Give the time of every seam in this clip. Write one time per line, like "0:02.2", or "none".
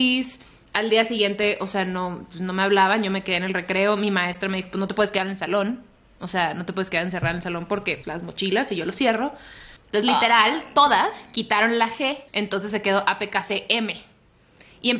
0:08.0
0:09.8
0:12.3